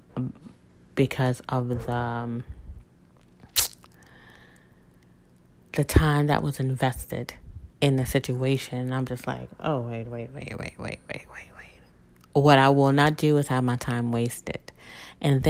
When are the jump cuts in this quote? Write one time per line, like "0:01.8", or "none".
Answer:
none